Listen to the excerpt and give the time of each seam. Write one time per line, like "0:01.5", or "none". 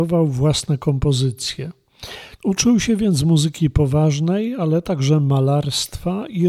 0:02.4